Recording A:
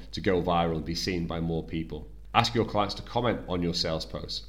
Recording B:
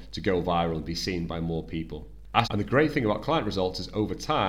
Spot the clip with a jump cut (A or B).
B